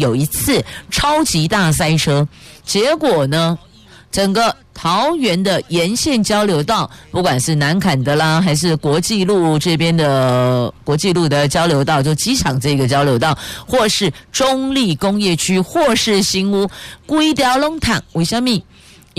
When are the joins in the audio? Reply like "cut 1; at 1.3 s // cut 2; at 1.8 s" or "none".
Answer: none